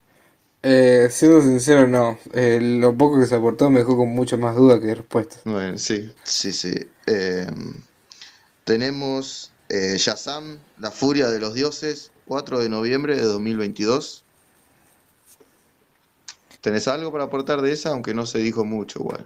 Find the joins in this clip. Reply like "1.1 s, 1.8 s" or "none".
6.2 s, 16.6 s